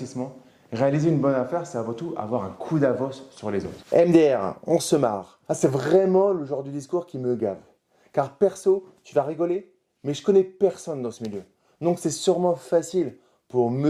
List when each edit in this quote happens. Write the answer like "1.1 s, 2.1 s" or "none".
none